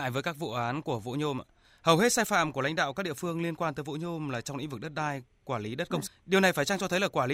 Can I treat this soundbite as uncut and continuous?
no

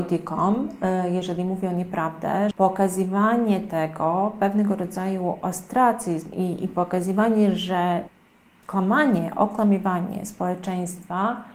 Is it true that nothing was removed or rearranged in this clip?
no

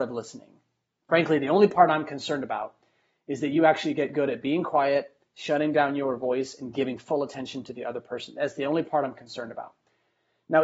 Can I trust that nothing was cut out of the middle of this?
yes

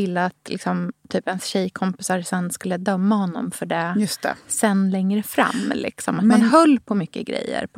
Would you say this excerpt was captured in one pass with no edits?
yes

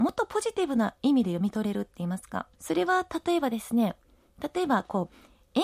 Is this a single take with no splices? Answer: no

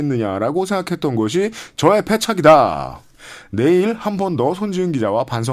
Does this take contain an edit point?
no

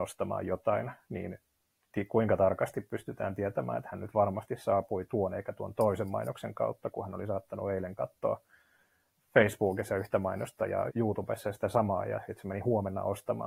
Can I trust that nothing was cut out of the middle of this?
no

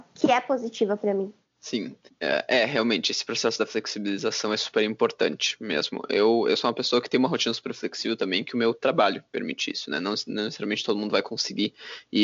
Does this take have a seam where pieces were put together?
no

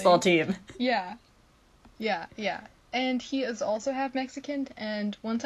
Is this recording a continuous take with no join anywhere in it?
yes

